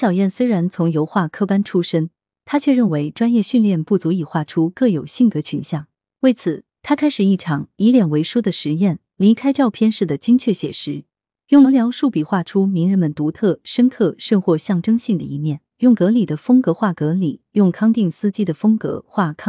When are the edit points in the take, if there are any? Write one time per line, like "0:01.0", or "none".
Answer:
0:11.6
0:15.7